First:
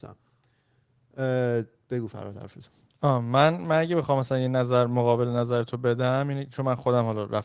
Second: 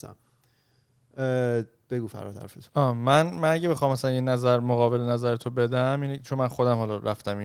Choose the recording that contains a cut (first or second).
second